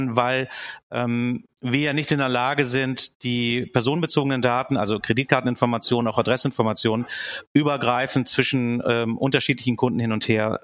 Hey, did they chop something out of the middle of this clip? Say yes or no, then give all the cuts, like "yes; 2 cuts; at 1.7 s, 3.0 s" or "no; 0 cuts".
no; 0 cuts